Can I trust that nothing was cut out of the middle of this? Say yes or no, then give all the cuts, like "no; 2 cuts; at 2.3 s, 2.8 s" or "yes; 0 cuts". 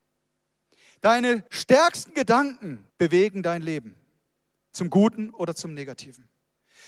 no; 2 cuts; at 1.5 s, 2.9 s